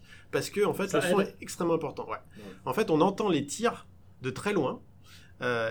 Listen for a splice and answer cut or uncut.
uncut